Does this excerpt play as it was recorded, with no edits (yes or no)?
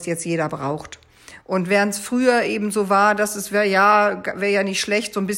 no